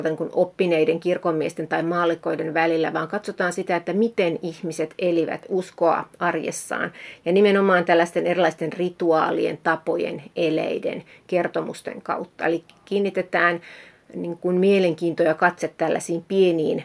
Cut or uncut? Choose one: uncut